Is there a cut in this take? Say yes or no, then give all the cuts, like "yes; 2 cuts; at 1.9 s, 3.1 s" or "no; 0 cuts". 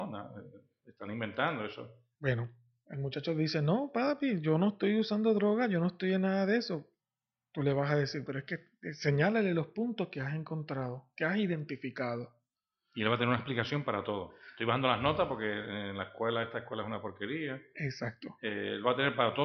yes; 2 cuts; at 2.2 s, 8.3 s